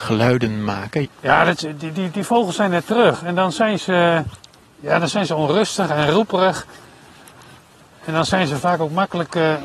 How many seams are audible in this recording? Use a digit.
1